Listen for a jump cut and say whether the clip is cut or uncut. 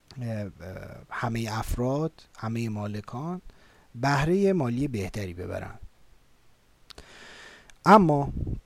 uncut